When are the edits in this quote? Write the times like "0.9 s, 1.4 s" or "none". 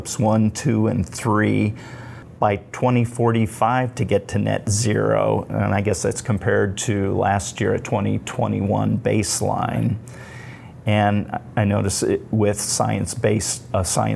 none

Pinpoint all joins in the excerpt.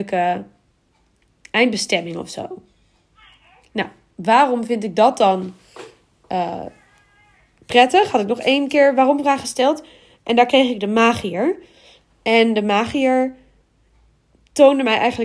none

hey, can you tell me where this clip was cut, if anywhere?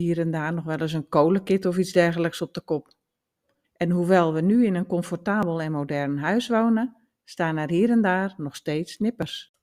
3.6 s

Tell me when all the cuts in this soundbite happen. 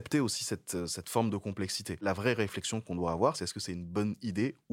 3.3 s

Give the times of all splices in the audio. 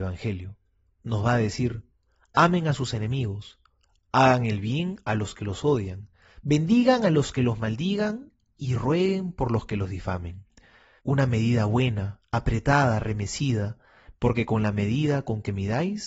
11.0 s, 14.1 s

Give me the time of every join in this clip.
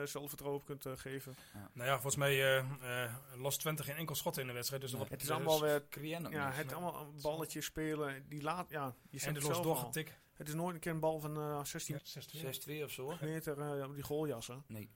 5.1 s, 12.0 s, 13.2 s

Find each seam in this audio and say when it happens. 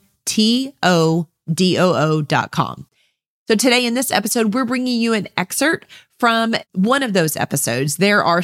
none

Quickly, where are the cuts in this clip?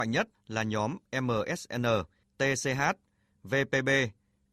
2.2 s

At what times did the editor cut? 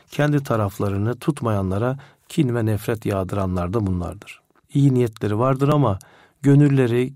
4.6 s

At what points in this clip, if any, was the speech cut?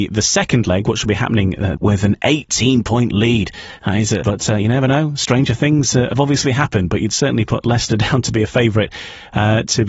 1.8 s, 4.2 s

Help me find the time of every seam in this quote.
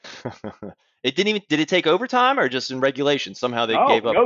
none

